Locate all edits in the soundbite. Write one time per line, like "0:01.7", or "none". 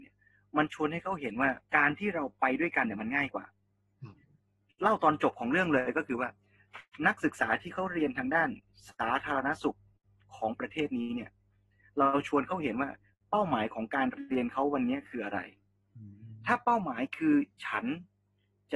0:01.7

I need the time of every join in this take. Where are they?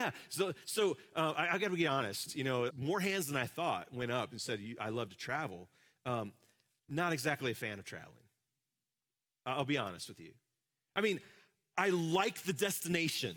0:02.7
0:06.8

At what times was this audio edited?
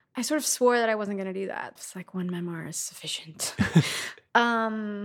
0:01.8

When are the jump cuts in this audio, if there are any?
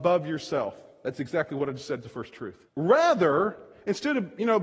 0:02.7

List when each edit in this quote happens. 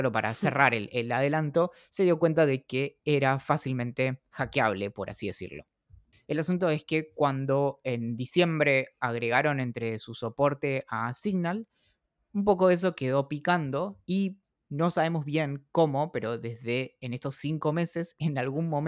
0:06.1

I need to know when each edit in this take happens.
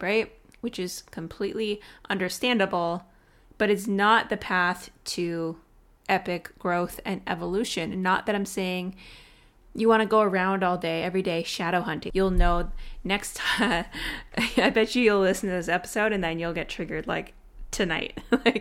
0:12.1

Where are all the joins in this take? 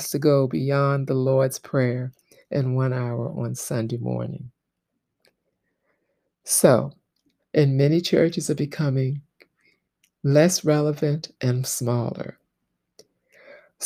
0:07.4

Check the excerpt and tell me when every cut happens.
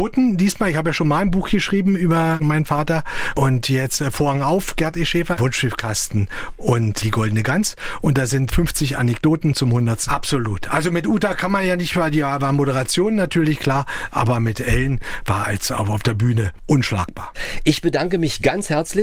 0:05.4
0:10.1

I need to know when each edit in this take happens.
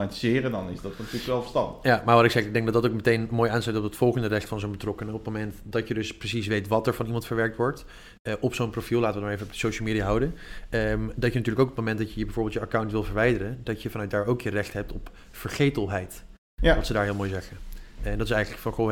none

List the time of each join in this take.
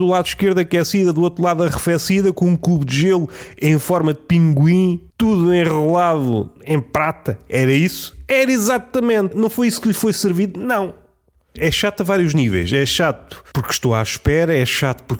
0:05.1

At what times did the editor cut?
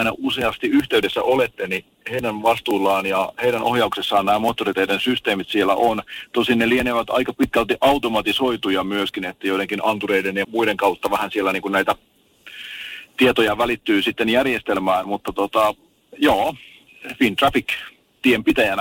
0:10.4

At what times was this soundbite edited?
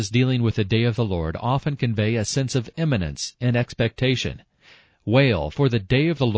0:03.3

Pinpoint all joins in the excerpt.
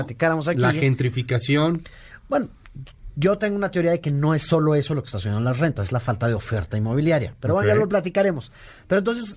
none

